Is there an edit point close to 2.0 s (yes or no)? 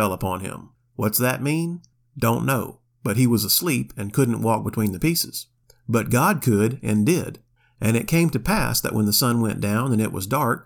no